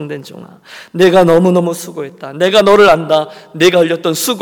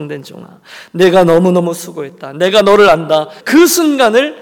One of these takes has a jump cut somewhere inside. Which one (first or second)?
second